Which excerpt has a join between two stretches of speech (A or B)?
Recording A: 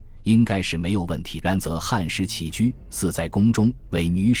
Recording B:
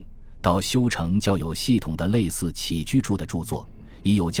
A